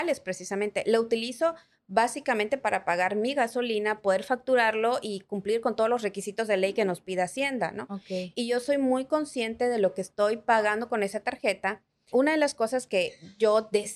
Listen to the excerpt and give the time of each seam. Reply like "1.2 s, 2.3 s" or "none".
12.1 s

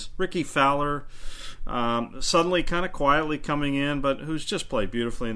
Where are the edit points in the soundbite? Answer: none

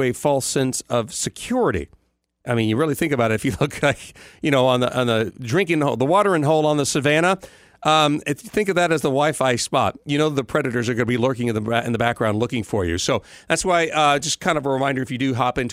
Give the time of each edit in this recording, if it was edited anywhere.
none

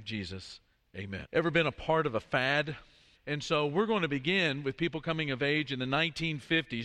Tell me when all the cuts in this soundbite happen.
1.2 s, 3.1 s

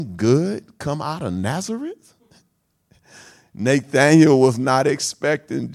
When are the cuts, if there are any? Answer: none

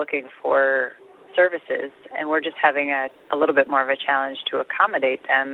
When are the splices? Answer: 2.1 s

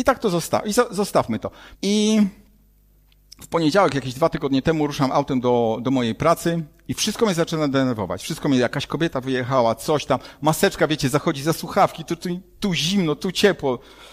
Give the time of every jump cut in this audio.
1.7 s

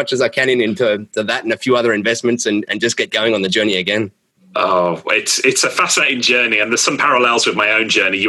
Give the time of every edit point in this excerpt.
none

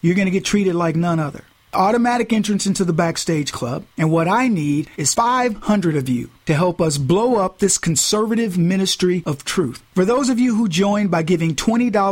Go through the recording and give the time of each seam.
3.9 s

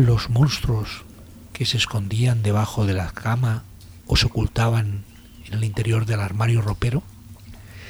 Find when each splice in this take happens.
4.0 s

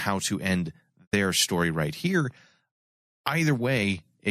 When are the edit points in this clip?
none

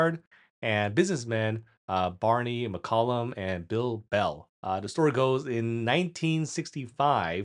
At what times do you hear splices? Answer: 4.5 s

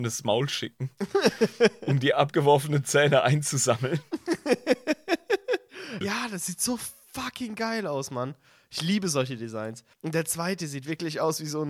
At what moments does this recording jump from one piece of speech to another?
6.0 s, 9.9 s

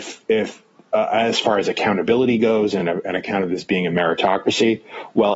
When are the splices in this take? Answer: none

